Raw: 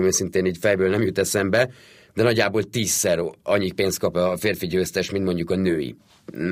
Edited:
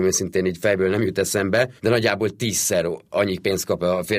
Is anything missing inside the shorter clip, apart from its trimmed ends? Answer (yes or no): yes